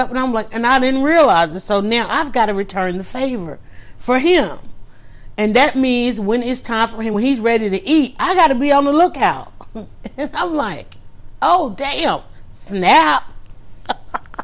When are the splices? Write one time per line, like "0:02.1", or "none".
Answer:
none